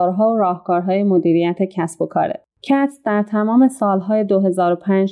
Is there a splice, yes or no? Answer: yes